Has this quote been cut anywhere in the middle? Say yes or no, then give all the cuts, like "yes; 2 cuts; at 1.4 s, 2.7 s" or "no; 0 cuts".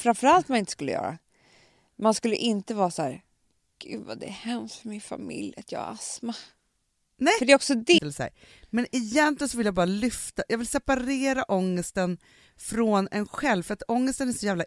yes; 1 cut; at 8.0 s